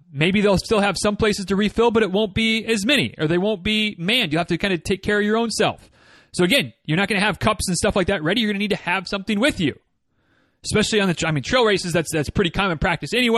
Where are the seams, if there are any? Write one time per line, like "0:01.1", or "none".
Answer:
none